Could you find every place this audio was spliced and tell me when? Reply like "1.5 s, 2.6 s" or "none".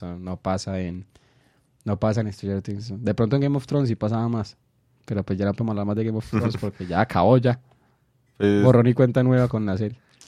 none